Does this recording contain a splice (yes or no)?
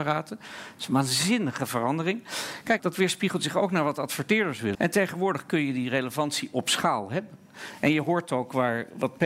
yes